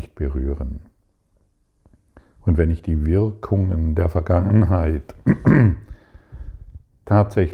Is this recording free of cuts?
yes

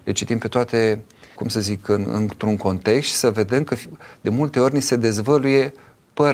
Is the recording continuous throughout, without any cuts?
no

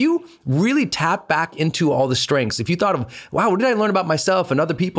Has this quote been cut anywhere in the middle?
no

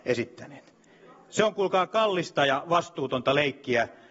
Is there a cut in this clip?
no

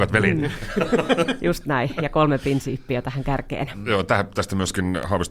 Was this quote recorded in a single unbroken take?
yes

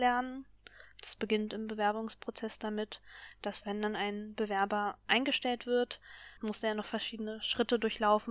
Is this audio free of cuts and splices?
yes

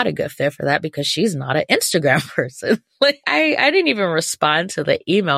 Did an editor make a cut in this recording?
yes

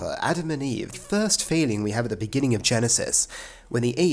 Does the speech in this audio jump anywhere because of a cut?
yes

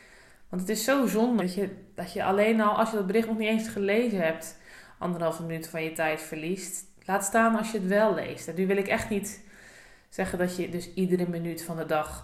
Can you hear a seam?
yes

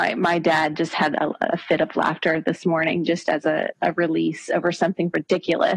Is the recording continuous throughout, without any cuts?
yes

